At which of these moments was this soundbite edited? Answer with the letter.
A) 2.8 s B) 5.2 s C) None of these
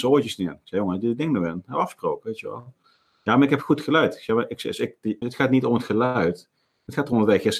B